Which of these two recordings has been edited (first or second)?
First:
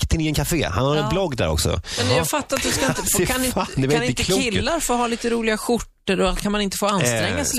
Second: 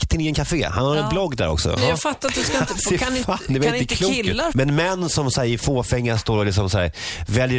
second